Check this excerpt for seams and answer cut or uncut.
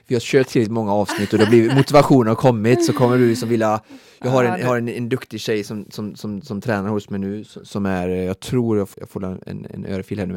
cut